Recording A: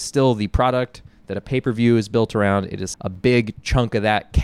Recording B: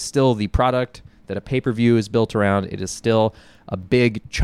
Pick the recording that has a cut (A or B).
A